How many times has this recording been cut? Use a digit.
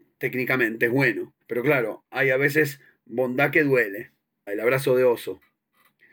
2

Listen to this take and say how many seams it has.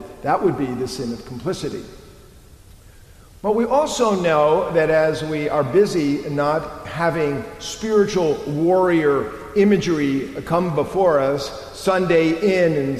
0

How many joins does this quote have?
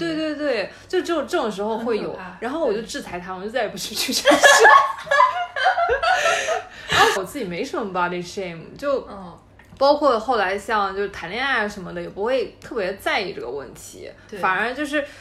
1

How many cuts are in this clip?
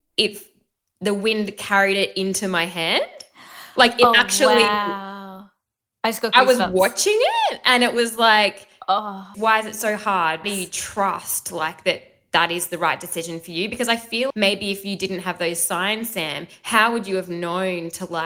3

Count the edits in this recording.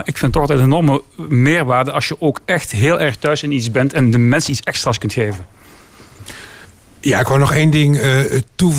0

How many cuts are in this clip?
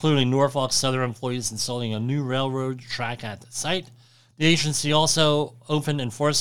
0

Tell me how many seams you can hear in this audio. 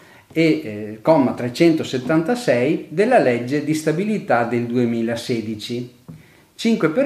0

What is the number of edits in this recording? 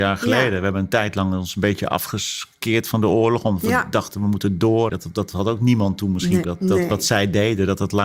2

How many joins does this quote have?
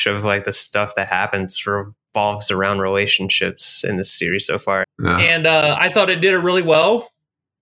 1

